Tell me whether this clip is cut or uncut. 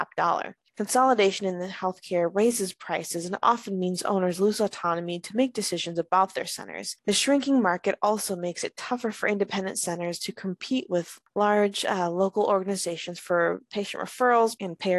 uncut